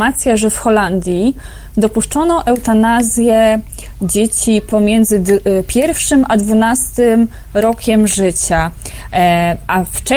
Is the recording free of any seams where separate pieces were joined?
yes; 0 cuts

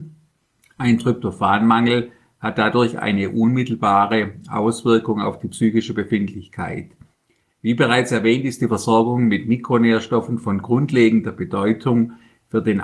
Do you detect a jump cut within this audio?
no; 0 cuts

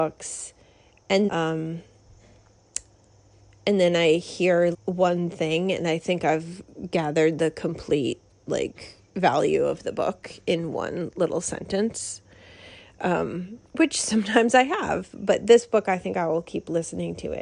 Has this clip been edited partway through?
yes; 3 cuts; at 1.3 s, 4.7 s, 13.7 s

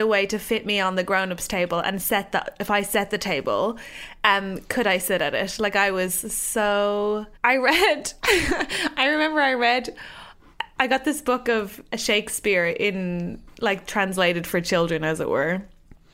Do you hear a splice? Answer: yes; 1 cut; at 7.4 s

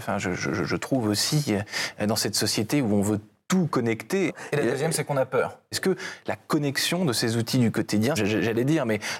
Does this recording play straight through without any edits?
no; 3 cuts; at 4.3 s, 5.7 s, 8.2 s

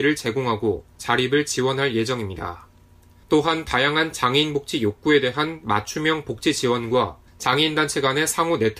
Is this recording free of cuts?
no; 2 cuts; at 3.2 s, 7.3 s

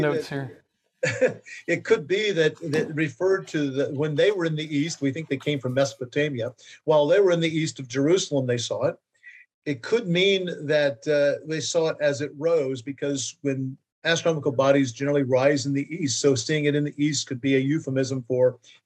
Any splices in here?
yes; 1 cut; at 9.5 s

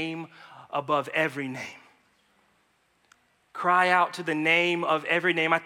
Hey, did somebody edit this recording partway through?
no; 0 cuts

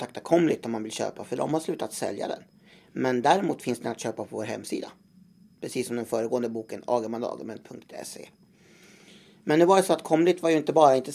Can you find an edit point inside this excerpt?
no; 0 cuts

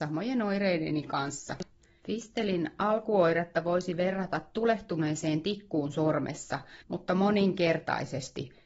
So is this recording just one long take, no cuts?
no; 1 cut; at 6.8 s

